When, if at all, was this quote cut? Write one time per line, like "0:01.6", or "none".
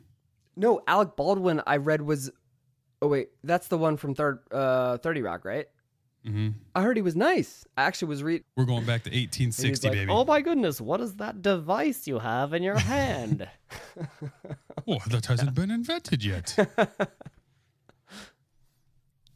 0:08.4